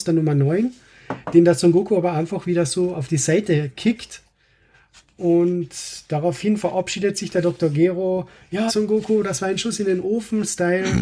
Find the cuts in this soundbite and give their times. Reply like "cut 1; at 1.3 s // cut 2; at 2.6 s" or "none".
cut 1; at 8.7 s